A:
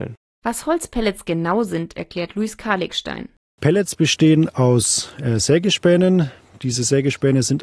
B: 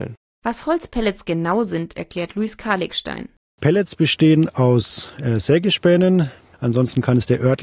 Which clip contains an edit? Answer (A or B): B